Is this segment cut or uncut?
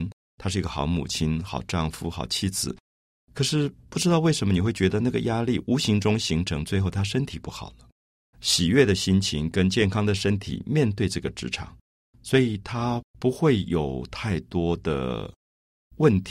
cut